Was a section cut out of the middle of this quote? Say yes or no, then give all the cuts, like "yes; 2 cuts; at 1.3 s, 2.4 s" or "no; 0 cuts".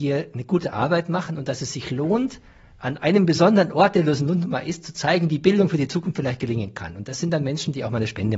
no; 0 cuts